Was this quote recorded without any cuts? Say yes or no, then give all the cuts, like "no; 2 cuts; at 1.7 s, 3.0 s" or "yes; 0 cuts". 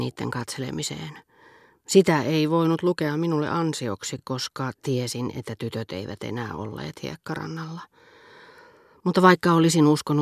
yes; 0 cuts